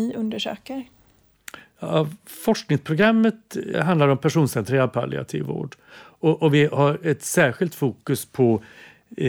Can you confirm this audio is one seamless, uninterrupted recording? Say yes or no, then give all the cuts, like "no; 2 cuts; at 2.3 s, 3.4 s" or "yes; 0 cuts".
no; 1 cut; at 3.7 s